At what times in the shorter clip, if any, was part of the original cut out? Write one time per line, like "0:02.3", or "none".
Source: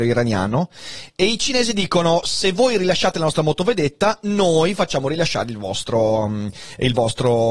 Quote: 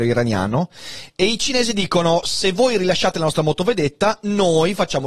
none